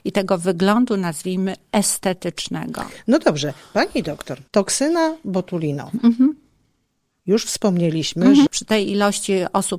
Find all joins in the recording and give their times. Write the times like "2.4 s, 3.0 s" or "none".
4.5 s, 8.5 s